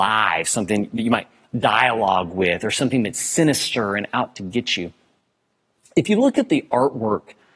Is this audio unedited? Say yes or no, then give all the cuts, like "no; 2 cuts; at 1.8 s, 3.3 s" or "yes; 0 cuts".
yes; 0 cuts